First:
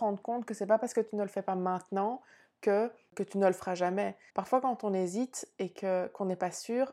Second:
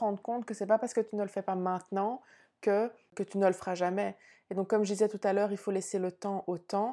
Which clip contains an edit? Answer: first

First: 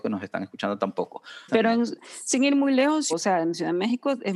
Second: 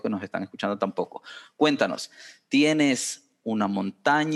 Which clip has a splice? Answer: first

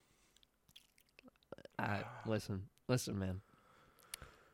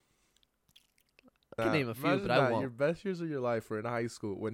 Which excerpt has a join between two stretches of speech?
second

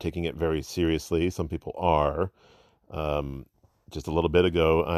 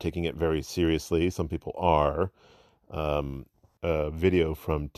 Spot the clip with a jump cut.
second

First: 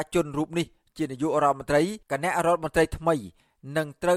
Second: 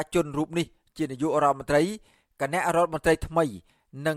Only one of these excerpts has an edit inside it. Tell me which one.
first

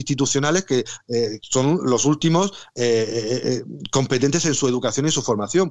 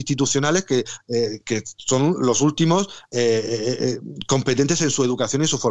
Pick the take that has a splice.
first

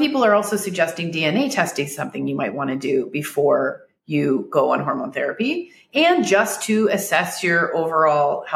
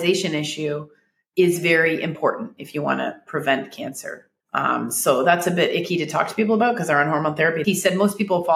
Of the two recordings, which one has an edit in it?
second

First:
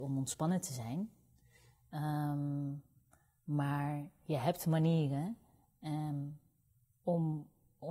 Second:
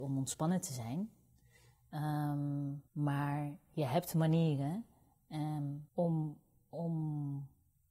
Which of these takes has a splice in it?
second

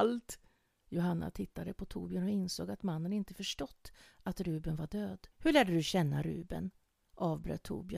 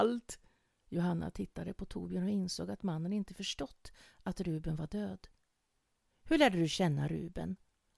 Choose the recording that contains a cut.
first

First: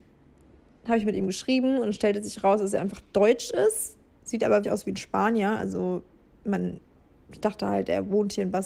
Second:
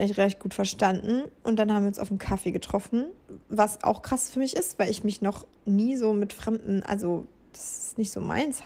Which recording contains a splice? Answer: first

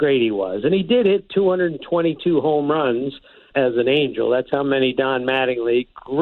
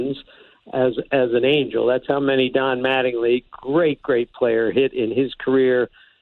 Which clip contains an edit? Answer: first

